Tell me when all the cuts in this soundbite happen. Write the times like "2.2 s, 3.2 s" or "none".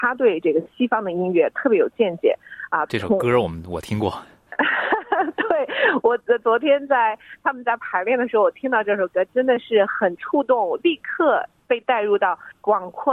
2.9 s